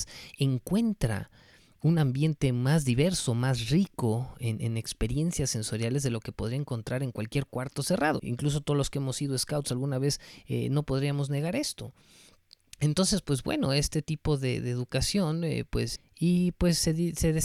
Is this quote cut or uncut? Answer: cut